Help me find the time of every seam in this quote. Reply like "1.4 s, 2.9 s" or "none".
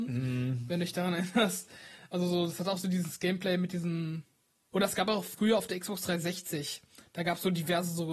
4.7 s